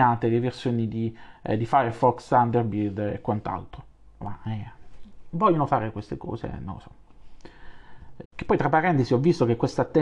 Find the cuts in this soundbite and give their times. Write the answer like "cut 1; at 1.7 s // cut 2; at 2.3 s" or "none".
cut 1; at 4.2 s // cut 2; at 8.2 s